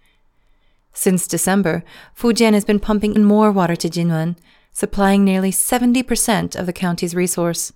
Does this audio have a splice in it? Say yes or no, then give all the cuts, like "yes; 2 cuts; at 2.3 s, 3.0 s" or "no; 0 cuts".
yes; 1 cut; at 3.2 s